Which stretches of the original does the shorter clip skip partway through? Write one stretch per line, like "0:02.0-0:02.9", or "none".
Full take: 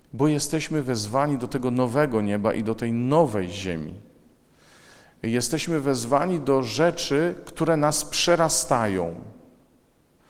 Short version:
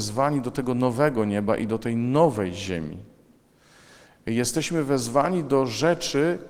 none